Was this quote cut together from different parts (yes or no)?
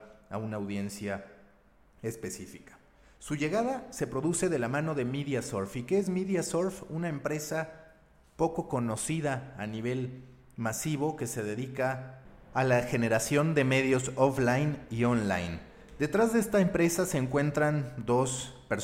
no